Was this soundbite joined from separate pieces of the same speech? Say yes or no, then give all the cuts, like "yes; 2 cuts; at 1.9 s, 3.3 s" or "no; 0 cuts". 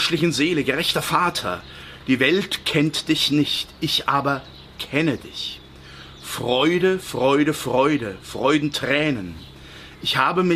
no; 0 cuts